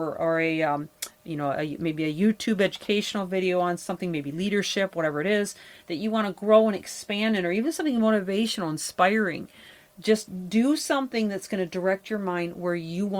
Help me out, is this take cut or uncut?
uncut